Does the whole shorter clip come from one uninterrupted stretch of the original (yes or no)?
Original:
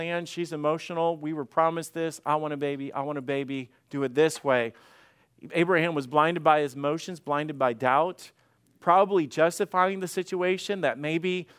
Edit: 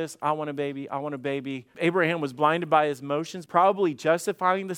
no